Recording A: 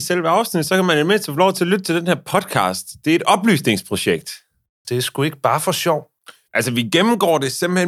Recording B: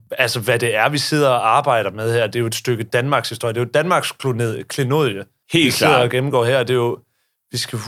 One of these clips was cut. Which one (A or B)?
A